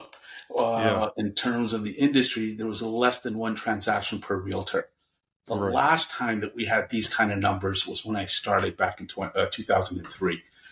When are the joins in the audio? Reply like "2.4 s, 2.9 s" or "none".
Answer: none

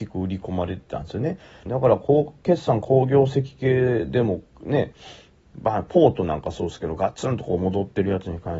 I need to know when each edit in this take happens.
1.7 s

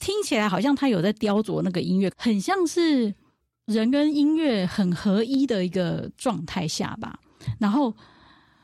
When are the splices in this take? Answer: 2.1 s

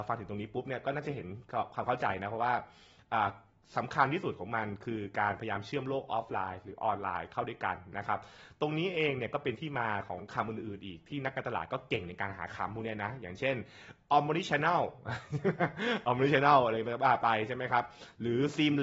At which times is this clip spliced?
none

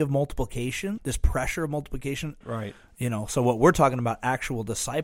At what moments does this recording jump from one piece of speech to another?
1.0 s, 2.4 s

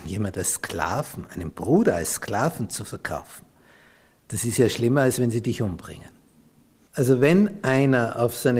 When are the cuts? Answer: 6.9 s

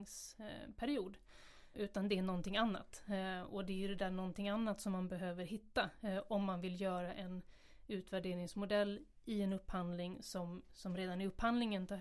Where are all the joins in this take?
1.7 s

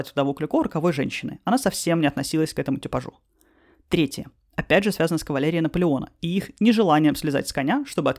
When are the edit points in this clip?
none

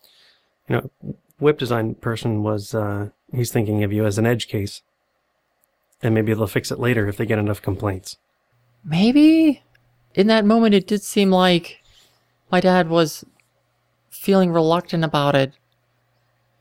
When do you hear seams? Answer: none

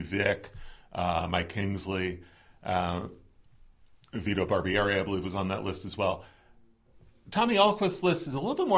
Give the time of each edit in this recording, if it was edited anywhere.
none

